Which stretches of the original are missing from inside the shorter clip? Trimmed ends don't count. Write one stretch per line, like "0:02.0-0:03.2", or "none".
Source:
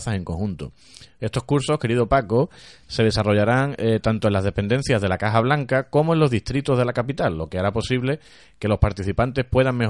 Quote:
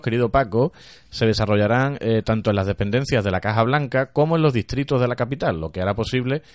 none